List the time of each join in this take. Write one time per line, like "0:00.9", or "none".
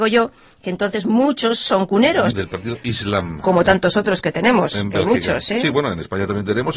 0:02.3